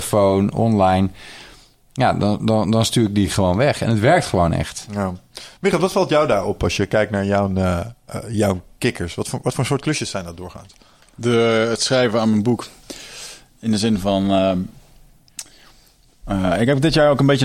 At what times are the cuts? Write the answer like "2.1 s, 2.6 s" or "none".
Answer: none